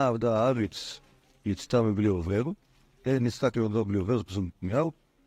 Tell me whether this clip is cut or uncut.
uncut